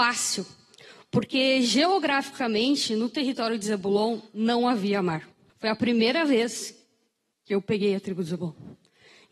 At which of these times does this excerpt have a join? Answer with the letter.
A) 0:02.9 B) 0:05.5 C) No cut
B